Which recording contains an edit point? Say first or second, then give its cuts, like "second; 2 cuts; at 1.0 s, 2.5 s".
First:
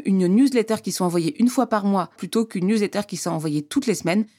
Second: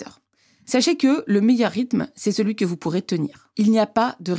first; 1 cut; at 2.2 s